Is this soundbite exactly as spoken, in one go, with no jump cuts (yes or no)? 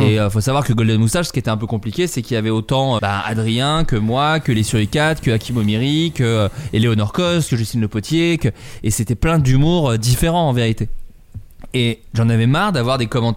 no